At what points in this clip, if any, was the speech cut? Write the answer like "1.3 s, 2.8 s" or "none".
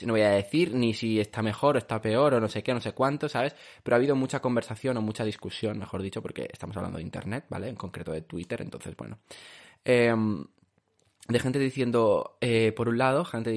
none